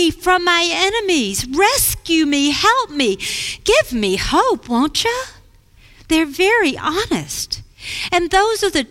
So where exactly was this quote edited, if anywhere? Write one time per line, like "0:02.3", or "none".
none